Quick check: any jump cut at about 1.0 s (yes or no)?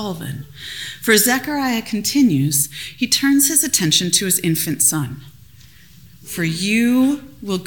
no